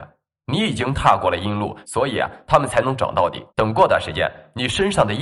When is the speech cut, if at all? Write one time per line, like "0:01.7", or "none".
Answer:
0:01.8
0:03.5